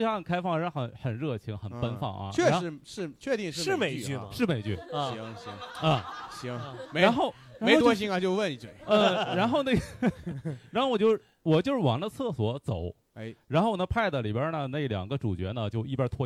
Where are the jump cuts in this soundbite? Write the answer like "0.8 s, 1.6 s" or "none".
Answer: none